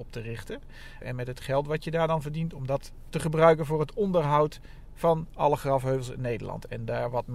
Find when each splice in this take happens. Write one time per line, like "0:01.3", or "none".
0:01.0